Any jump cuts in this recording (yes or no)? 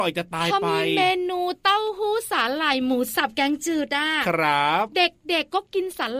no